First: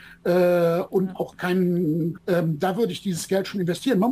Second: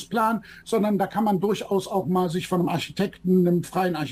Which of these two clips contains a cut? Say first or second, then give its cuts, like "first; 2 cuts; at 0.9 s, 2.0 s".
first; 1 cut; at 2.2 s